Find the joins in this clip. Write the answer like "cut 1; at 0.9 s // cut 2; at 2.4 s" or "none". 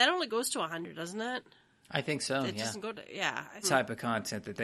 cut 1; at 3.6 s